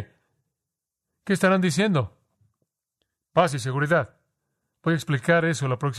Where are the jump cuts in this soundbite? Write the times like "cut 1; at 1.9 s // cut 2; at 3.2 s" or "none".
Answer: none